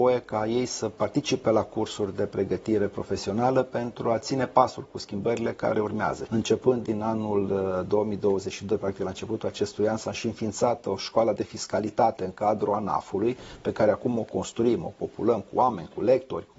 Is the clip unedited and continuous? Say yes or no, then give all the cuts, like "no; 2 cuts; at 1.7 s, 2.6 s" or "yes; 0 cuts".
no; 1 cut; at 6.3 s